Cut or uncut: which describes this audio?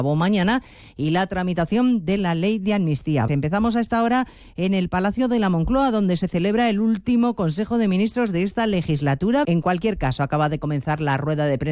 cut